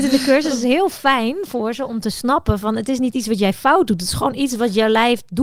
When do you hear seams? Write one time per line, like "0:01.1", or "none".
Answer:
0:01.9